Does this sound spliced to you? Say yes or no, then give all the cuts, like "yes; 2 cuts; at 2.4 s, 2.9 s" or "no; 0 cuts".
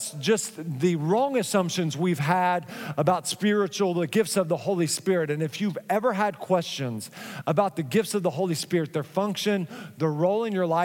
no; 0 cuts